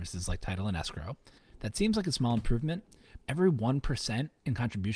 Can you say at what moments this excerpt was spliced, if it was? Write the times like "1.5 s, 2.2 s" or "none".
1.4 s, 3.2 s